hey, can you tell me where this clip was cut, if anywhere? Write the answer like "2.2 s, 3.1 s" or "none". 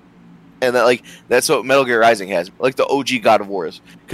2.5 s